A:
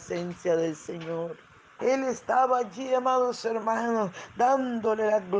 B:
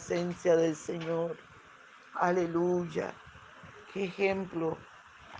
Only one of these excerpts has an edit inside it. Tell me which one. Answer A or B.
A